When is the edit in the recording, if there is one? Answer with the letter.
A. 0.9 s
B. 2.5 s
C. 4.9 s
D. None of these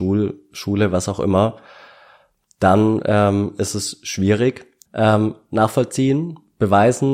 C